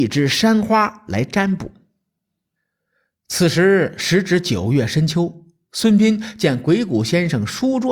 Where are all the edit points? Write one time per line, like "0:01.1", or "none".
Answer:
none